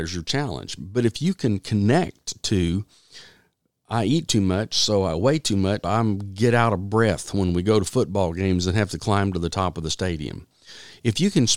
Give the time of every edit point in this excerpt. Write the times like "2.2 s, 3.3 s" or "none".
5.8 s